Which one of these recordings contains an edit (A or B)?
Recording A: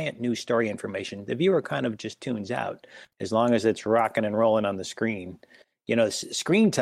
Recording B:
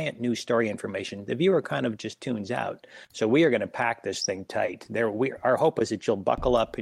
A